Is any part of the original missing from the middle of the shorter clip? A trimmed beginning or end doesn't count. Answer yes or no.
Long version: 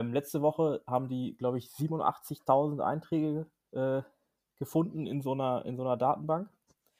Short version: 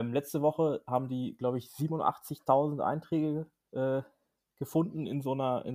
no